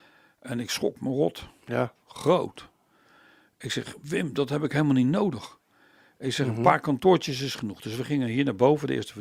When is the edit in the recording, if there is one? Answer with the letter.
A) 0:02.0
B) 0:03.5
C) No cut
A